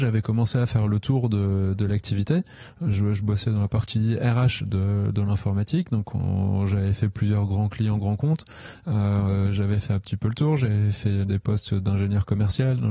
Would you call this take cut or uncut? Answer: uncut